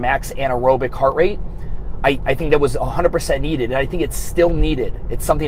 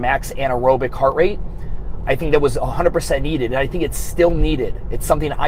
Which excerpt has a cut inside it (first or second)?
second